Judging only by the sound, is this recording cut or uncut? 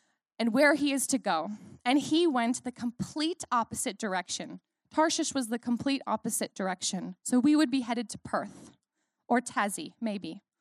uncut